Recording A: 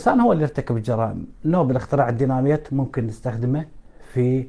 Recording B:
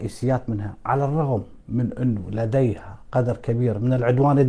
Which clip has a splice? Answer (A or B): B